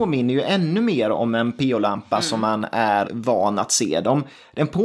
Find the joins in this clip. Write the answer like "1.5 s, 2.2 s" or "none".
3.0 s